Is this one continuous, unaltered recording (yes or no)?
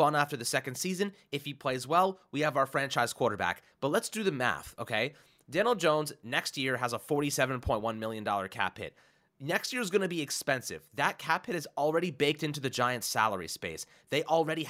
no